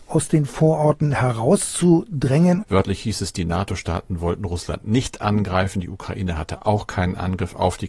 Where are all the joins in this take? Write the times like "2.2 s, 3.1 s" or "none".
2.6 s